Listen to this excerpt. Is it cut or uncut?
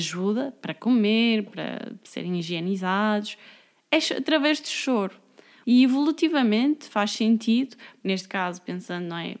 cut